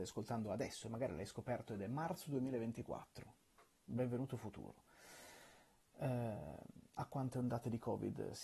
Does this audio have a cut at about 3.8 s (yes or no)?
no